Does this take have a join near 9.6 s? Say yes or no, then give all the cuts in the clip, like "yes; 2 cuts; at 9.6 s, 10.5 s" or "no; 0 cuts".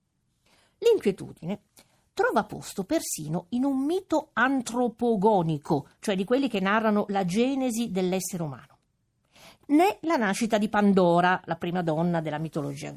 yes; 1 cut; at 9.6 s